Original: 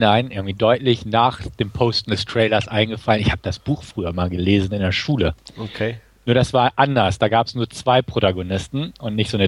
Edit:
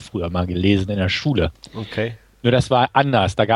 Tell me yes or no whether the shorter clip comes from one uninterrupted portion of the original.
yes